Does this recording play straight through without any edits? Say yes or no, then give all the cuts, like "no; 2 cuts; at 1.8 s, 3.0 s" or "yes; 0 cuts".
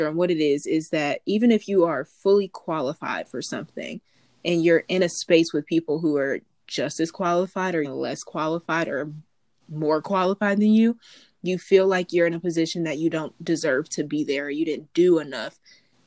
no; 1 cut; at 7.8 s